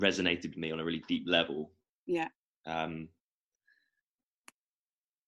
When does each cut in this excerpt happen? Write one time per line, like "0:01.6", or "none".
0:02.6